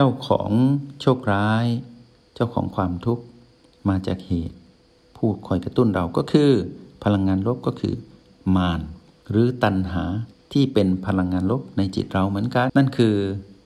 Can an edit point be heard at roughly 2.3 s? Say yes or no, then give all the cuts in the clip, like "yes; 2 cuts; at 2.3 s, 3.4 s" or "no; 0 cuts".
no; 1 cut; at 12.7 s